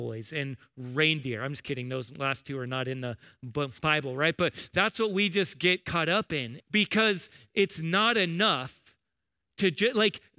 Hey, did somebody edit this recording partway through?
yes; 1 cut; at 6.6 s

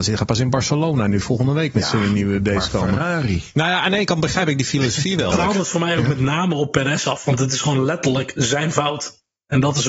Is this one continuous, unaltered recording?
no; 1 cut; at 5.3 s

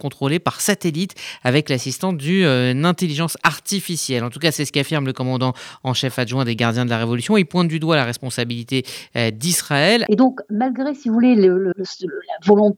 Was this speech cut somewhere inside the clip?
yes; 2 cuts; at 10.1 s, 11.7 s

